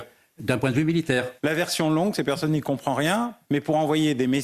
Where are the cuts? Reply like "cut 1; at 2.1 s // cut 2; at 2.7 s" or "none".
cut 1; at 1.4 s // cut 2; at 3.4 s